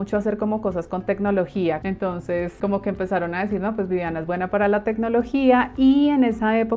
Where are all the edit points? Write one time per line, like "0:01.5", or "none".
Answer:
none